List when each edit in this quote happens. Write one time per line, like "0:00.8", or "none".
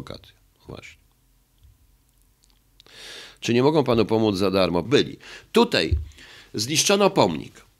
0:04.8

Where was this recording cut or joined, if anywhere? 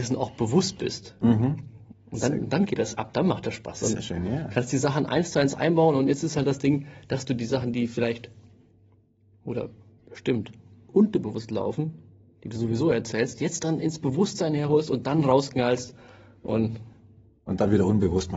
0:01.9

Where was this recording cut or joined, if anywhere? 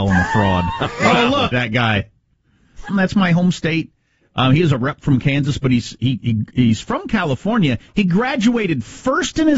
0:01.5
0:02.9

